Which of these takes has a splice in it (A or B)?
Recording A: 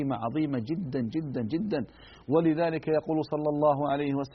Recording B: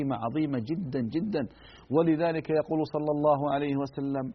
B